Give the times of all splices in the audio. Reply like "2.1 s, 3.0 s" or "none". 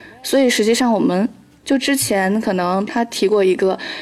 1.6 s, 2.9 s